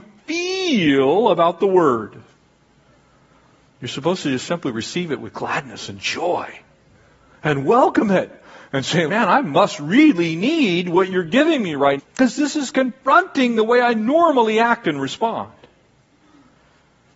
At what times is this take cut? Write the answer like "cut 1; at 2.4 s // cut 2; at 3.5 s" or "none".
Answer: cut 1; at 9.1 s // cut 2; at 12.0 s